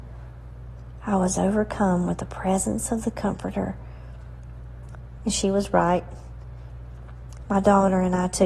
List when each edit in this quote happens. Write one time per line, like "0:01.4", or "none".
0:05.2
0:07.5

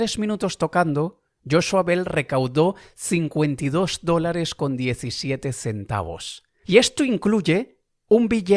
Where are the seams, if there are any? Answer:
0:06.6

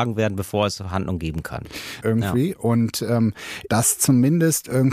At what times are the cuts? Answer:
0:02.0
0:03.7

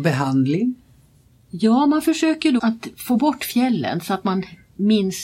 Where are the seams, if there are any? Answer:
0:02.6

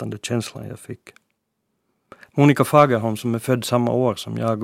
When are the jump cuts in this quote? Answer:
0:02.3

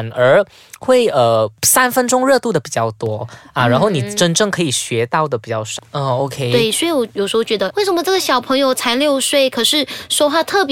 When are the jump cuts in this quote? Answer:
0:05.8
0:07.7

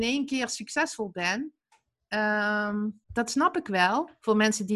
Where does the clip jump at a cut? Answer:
0:03.0

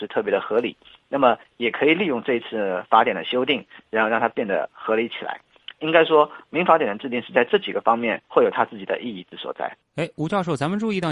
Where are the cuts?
none

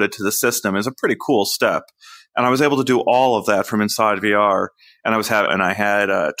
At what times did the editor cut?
0:05.5

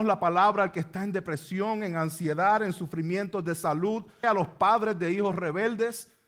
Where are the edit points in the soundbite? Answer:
0:04.2

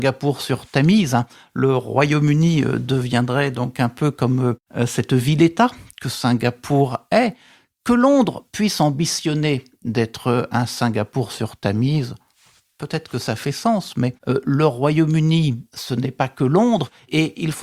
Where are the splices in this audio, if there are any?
none

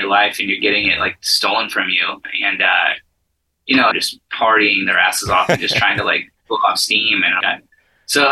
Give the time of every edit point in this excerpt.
0:03.9
0:07.4

